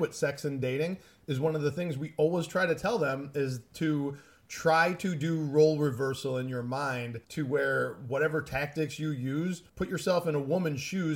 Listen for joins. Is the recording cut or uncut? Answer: cut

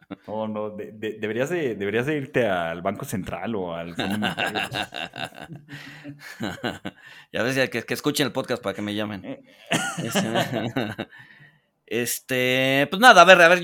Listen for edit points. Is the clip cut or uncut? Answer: uncut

